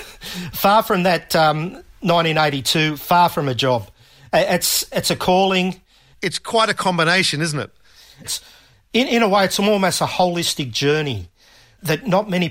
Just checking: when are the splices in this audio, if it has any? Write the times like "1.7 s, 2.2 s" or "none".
6.1 s, 8.2 s